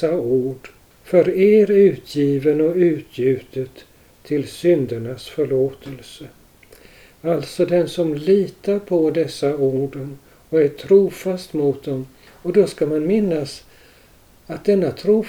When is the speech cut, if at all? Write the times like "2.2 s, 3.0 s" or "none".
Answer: none